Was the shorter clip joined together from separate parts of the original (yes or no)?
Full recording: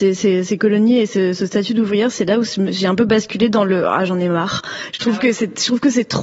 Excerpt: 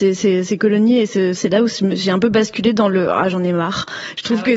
yes